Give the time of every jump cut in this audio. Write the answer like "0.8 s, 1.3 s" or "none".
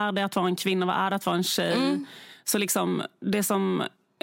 none

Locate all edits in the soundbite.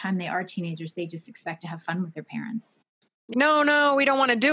3.3 s

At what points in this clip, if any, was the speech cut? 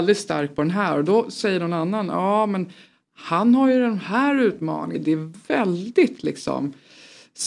4.9 s

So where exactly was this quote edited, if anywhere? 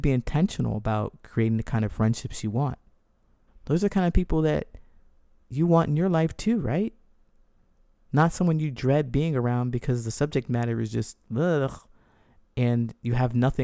3.5 s

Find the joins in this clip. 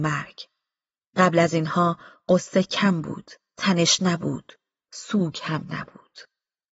none

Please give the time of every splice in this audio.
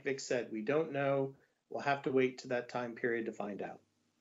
none

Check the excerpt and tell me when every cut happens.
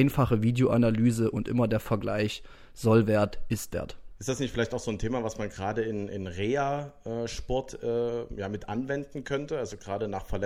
4.2 s

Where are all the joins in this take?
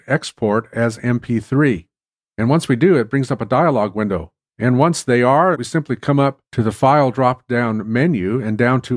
4.5 s, 5.5 s

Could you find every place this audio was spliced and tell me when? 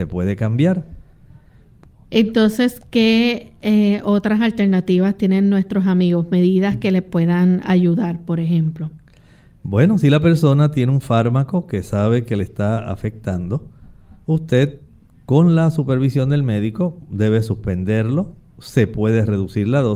2.0 s

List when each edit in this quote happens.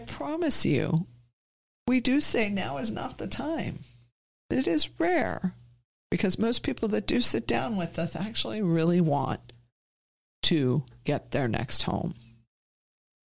none

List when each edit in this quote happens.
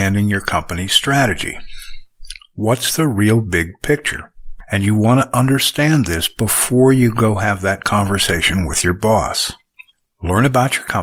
none

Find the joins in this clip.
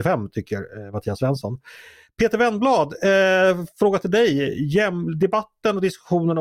none

